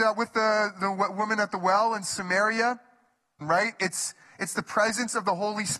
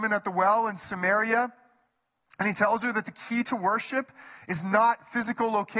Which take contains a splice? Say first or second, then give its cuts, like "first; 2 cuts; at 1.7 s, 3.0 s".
first; 1 cut; at 3.4 s